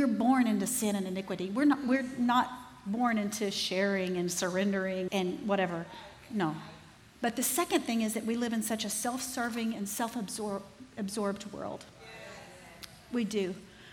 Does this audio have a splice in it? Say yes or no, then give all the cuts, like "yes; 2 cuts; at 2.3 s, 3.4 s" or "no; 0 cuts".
yes; 1 cut; at 5.1 s